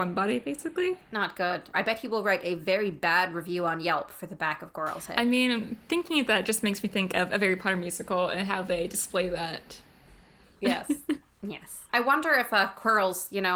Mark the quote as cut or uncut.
cut